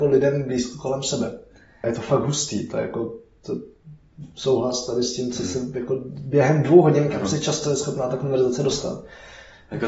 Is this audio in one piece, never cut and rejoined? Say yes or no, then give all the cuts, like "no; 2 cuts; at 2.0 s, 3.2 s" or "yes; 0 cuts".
no; 1 cut; at 1.8 s